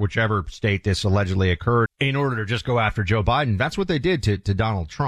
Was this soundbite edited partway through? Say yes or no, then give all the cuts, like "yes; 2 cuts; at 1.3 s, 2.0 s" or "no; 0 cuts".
yes; 1 cut; at 1.9 s